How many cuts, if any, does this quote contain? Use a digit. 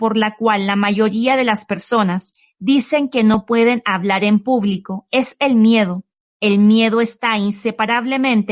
1